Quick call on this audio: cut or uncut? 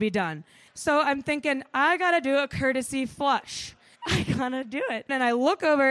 cut